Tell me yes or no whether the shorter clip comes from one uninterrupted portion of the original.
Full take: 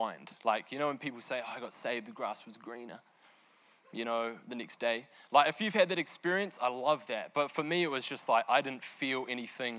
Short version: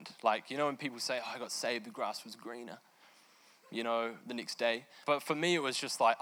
no